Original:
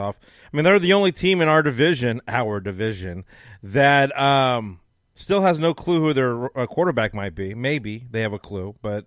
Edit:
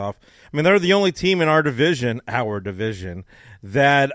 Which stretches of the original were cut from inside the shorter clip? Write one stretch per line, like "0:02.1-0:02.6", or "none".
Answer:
none